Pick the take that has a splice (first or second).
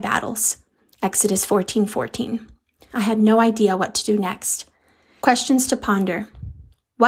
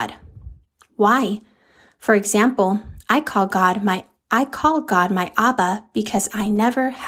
first